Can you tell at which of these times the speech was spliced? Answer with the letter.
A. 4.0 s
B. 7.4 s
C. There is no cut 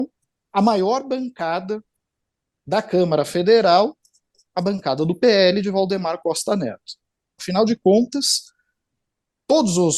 B